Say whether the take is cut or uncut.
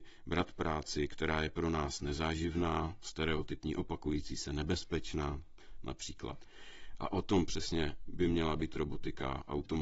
cut